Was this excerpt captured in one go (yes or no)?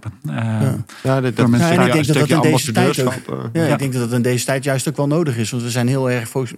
yes